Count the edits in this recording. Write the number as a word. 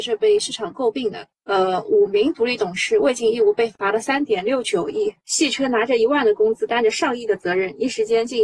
one